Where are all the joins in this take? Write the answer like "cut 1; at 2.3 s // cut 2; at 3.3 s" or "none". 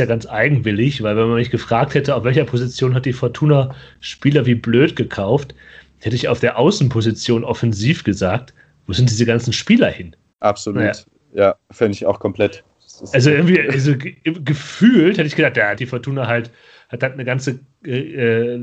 cut 1; at 10.3 s // cut 2; at 15.8 s

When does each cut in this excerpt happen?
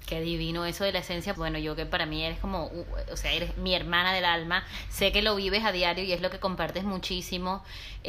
cut 1; at 1.3 s

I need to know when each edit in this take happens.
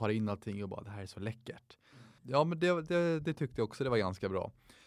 cut 1; at 2.2 s

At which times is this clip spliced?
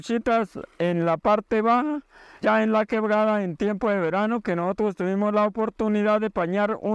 cut 1; at 2.4 s

